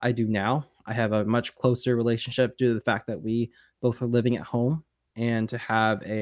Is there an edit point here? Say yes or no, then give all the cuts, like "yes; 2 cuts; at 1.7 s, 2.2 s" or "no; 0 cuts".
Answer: yes; 1 cut; at 5.1 s